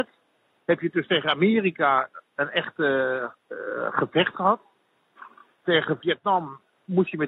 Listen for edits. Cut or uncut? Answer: uncut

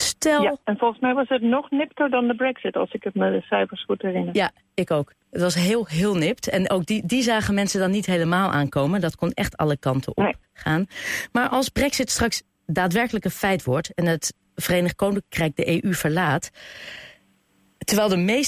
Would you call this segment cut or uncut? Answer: uncut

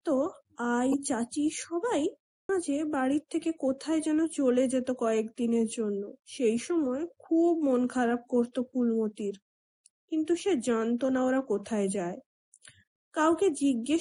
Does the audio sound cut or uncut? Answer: cut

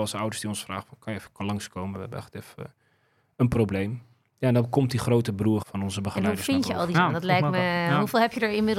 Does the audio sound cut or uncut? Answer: cut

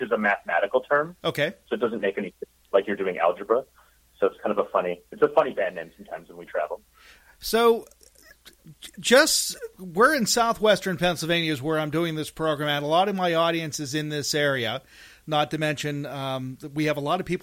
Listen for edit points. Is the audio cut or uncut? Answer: uncut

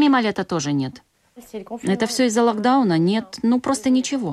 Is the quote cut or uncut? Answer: uncut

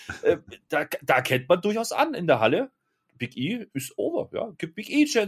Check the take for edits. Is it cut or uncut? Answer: uncut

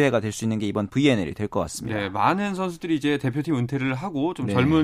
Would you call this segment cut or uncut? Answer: uncut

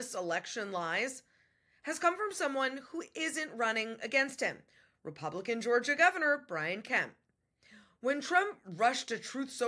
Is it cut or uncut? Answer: uncut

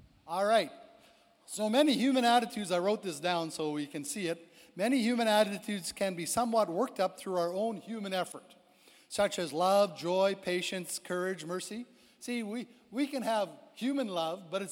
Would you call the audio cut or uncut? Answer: uncut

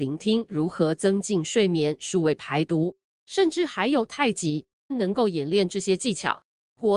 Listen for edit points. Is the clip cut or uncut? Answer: cut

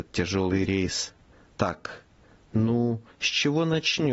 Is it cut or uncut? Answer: cut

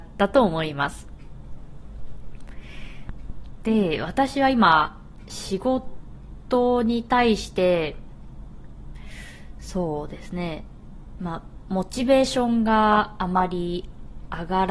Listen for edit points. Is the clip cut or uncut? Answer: uncut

